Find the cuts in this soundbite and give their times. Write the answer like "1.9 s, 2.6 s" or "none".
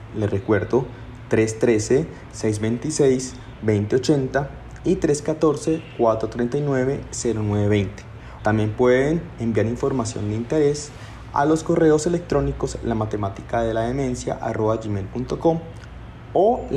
8.4 s